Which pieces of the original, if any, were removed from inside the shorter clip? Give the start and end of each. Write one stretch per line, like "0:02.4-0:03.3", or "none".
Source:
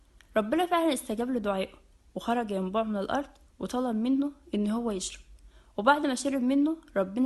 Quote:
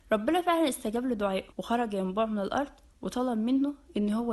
0:01.8-0:02.1